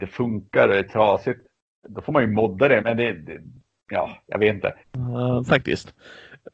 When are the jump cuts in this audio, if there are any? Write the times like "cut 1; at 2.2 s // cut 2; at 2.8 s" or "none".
cut 1; at 2.8 s // cut 2; at 4.8 s